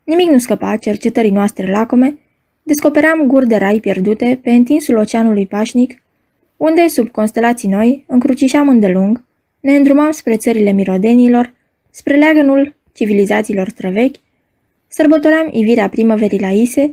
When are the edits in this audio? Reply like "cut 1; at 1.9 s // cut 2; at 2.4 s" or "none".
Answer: none